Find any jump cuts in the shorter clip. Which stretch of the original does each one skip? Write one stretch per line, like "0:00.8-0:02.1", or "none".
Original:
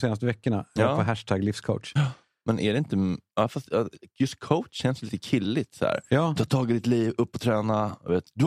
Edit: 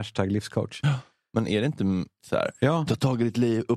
0:03.3-0:05.7